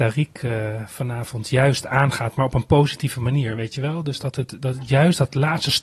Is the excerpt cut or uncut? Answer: uncut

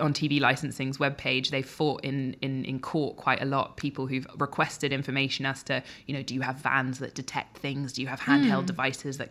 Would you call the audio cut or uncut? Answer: uncut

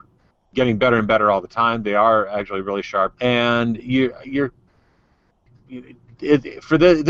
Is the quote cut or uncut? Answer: cut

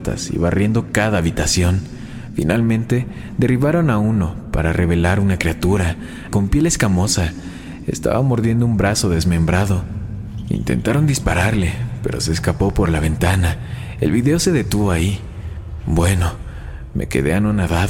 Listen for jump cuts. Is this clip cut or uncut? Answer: cut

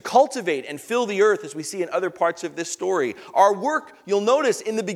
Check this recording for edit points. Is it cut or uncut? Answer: uncut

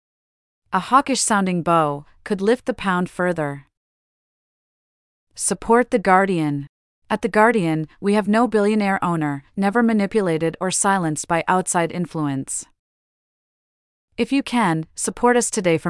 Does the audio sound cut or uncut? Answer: cut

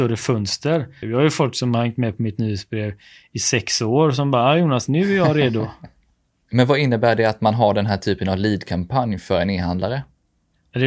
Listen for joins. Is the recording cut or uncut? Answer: cut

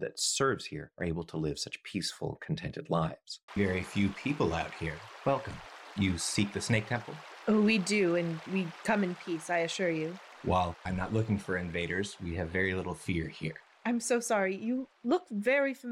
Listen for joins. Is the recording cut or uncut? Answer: cut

